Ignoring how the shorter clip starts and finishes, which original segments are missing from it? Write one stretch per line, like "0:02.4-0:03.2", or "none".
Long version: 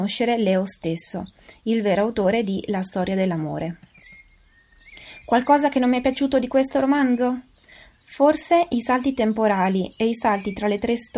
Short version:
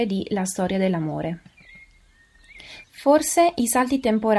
0:05.2-0:08.0